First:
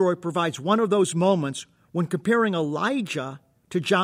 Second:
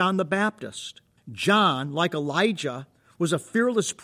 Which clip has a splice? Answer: second; 1 cut; at 1.2 s

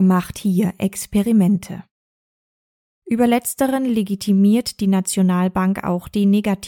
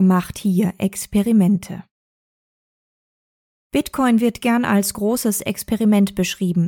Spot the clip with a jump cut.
first; 1 cut; at 3.0 s

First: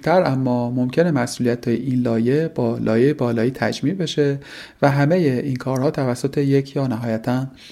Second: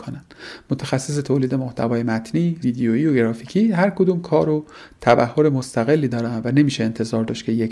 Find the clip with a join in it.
second; 1 cut; at 2.6 s

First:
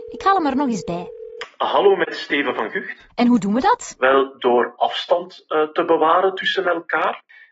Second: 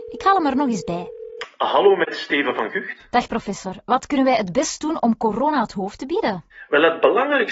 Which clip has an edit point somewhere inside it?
first; 1 cut; at 3.1 s

